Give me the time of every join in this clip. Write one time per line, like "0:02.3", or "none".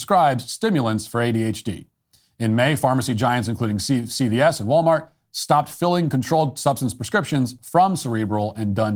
none

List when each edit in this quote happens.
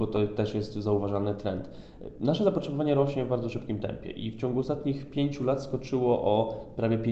none

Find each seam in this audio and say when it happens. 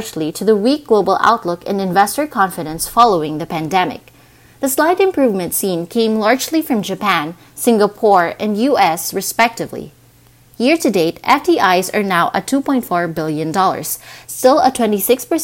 0:09.1

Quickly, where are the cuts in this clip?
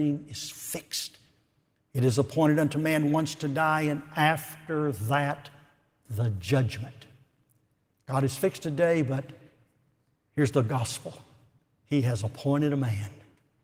none

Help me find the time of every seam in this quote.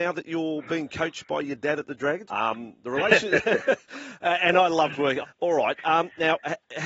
0:02.3
0:05.2

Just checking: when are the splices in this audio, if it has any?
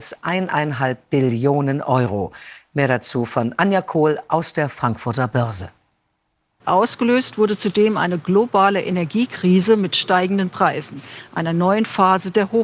0:06.6

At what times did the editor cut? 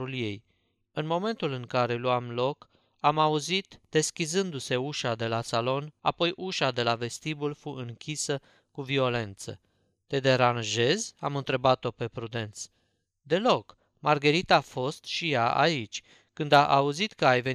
0:06.0

